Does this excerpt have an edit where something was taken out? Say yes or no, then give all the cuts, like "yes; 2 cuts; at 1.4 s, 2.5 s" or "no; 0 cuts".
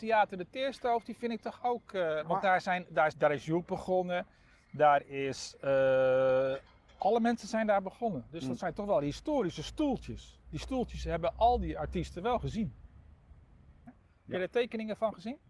yes; 2 cuts; at 3.1 s, 13.9 s